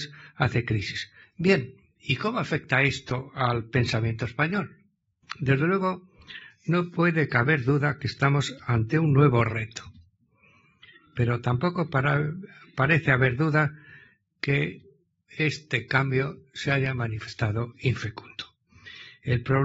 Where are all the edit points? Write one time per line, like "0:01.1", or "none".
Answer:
0:01.2